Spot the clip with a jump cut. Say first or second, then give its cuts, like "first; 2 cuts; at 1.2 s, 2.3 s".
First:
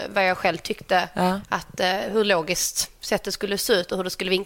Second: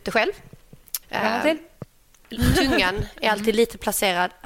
second; 1 cut; at 1.0 s